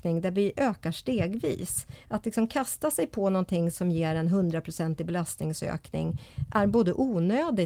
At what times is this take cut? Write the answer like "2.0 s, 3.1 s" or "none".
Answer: none